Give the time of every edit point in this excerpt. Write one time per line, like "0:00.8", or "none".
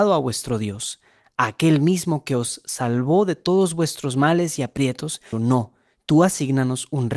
0:05.3

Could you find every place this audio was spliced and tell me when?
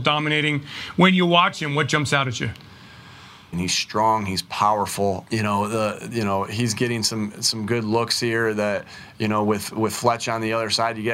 0:03.5
0:05.3

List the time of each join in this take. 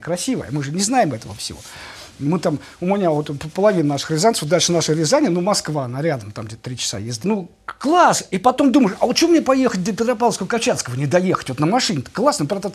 0:07.2

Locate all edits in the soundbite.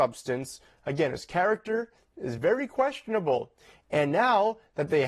none

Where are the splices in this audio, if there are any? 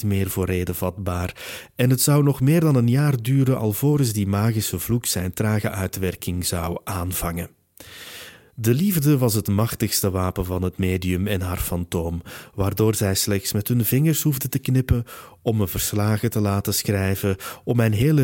none

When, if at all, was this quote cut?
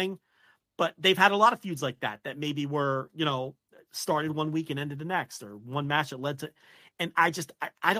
none

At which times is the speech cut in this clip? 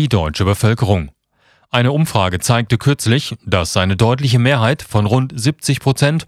none

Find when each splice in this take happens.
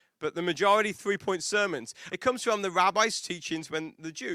0:02.1

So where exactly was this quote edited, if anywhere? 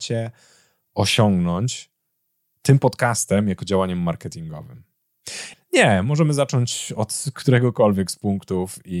0:05.5

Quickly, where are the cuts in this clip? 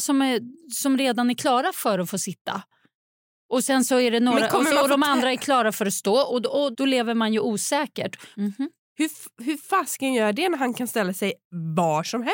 0:06.7
0:08.3

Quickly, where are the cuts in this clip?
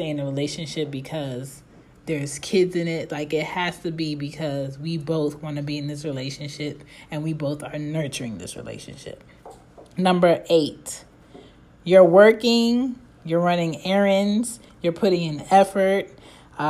0:14.7

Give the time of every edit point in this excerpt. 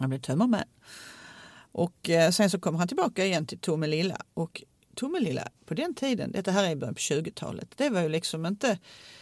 0:05.6

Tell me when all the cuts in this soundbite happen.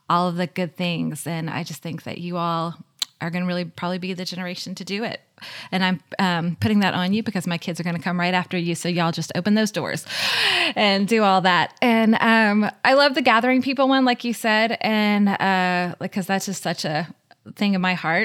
none

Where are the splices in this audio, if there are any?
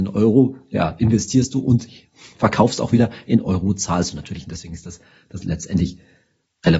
none

